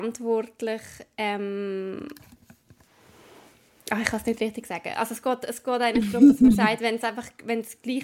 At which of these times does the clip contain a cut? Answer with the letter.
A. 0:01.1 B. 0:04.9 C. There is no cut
C